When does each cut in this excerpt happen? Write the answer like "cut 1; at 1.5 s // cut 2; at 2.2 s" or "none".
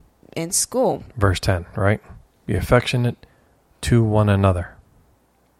cut 1; at 1.1 s